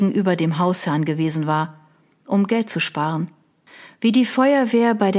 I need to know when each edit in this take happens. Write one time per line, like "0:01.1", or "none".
none